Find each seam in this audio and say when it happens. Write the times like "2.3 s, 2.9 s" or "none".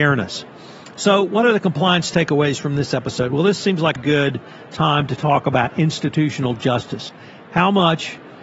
1.0 s, 4.0 s